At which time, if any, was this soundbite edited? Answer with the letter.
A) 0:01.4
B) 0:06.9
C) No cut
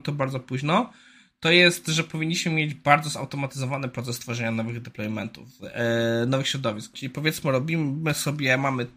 B